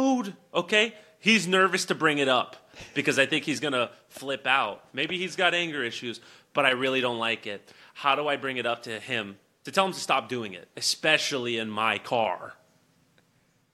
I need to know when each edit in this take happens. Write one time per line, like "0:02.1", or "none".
none